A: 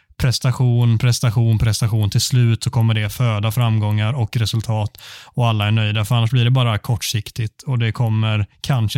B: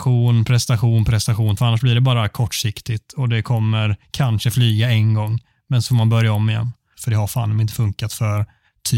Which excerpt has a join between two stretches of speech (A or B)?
B